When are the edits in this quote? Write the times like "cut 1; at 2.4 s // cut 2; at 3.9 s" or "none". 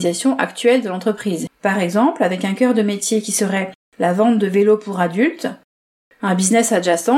cut 1; at 1.5 s